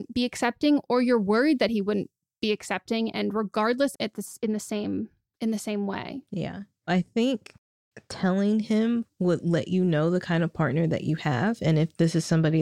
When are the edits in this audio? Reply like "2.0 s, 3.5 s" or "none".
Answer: 3.9 s, 6.9 s